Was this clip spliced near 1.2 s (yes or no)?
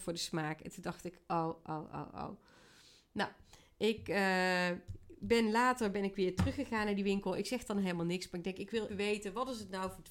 yes